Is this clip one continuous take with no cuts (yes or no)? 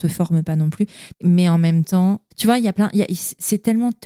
no